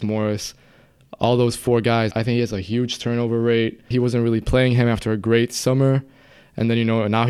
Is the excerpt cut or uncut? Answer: cut